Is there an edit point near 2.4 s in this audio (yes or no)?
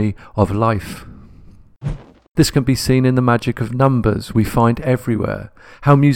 yes